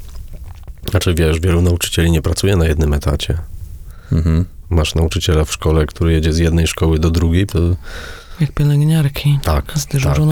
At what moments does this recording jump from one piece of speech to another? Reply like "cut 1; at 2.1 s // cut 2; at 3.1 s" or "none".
cut 1; at 7.5 s